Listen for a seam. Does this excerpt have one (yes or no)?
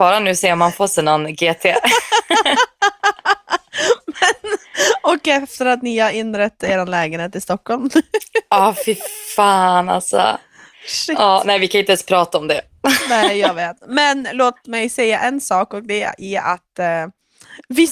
no